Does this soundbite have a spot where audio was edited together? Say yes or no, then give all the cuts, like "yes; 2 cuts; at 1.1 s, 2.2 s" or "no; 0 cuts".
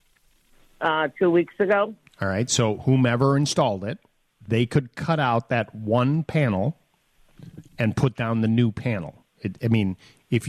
yes; 1 cut; at 2.1 s